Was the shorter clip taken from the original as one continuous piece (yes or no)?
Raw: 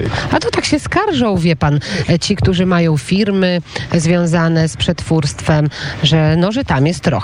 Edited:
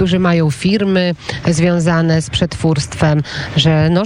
yes